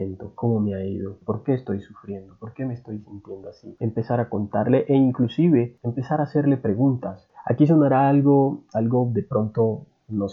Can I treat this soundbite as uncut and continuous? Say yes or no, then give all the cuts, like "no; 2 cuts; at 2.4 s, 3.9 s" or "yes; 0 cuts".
no; 1 cut; at 1.2 s